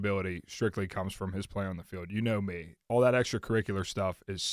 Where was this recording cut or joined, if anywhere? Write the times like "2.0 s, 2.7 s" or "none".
none

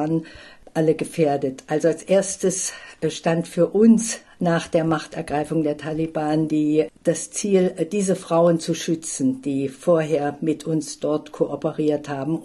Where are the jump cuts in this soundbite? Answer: none

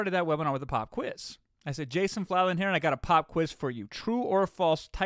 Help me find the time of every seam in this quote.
none

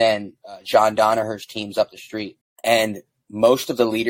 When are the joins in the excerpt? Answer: 2.4 s

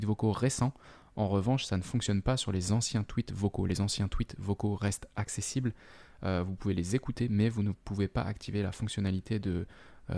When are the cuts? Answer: none

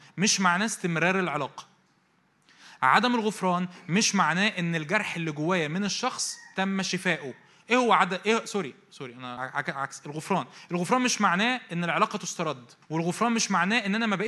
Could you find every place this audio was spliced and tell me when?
9.4 s, 12.8 s

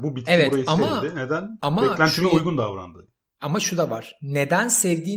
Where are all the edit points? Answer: none

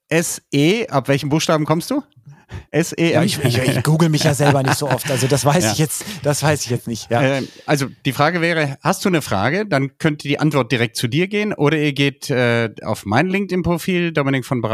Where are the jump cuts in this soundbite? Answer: 2.7 s

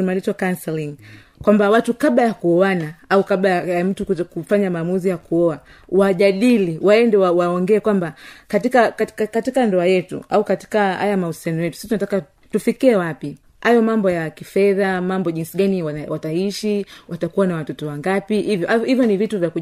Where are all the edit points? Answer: none

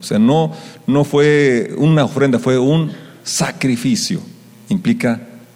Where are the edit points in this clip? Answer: 4.5 s

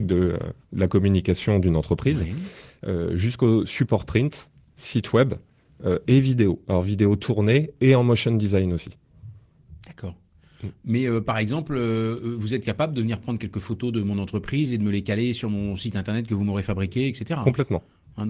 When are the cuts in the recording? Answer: none

